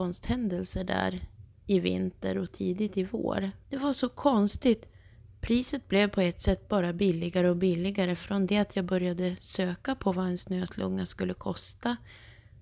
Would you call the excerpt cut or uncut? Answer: cut